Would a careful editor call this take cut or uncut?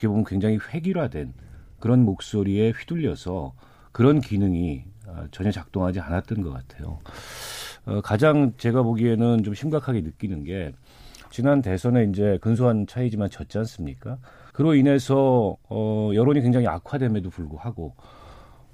cut